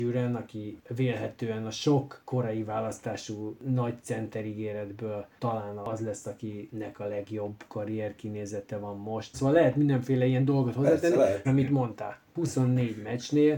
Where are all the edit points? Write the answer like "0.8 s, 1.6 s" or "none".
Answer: 9.3 s, 11.4 s